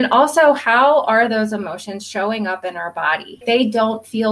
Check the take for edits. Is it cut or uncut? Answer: cut